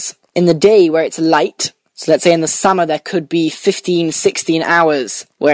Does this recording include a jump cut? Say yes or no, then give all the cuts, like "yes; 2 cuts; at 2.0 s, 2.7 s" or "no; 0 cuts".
no; 0 cuts